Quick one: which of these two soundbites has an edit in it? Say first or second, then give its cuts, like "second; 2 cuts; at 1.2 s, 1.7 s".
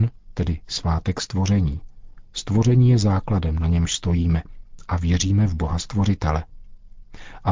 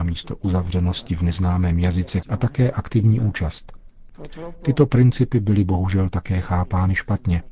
second; 1 cut; at 2.2 s